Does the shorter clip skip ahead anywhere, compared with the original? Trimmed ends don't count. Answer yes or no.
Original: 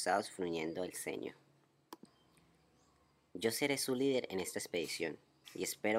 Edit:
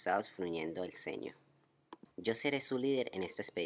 yes